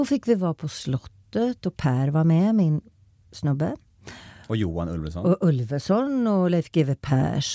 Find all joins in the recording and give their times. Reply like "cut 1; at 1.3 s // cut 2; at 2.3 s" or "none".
none

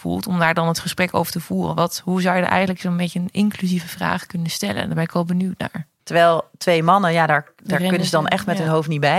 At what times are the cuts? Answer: cut 1; at 6.0 s

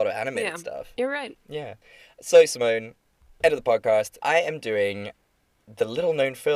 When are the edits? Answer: cut 1; at 1.4 s // cut 2; at 4.2 s

